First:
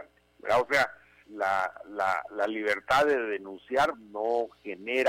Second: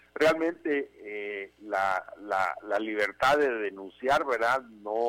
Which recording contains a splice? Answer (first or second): first